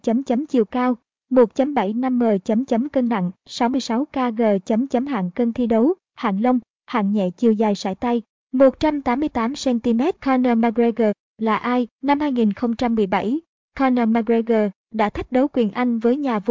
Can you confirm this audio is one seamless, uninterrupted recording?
no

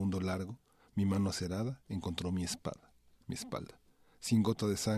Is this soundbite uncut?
yes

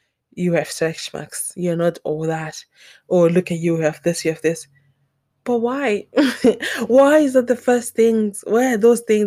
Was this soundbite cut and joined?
no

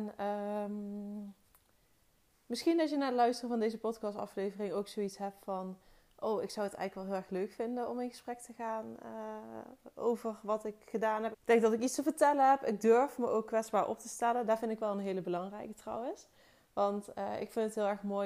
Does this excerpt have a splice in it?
yes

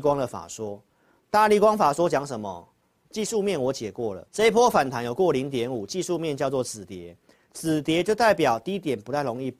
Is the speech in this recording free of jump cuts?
no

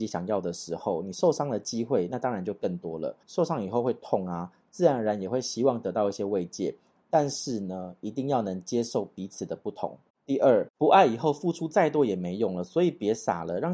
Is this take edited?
yes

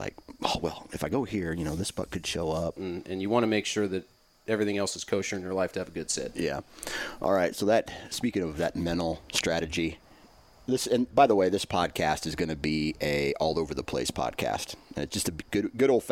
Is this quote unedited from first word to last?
no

